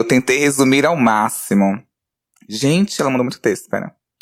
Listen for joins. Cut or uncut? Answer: uncut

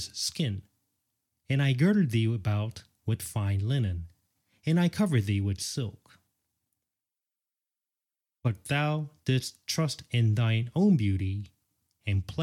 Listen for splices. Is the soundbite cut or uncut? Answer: cut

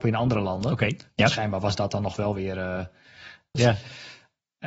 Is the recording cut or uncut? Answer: cut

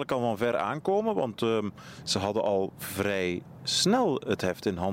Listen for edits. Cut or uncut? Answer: uncut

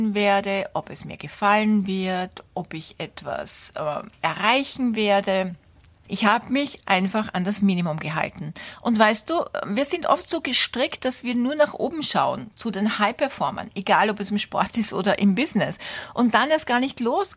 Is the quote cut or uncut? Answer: uncut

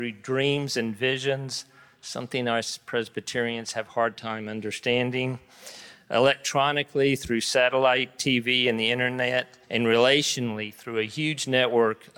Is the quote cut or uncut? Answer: cut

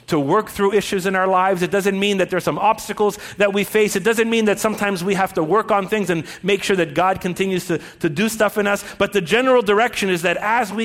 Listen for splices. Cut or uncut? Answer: uncut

